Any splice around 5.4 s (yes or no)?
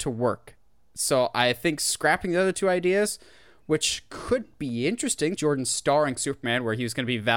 yes